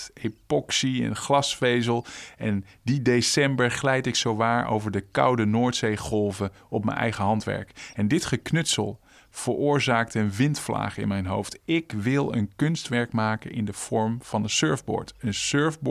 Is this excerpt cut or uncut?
uncut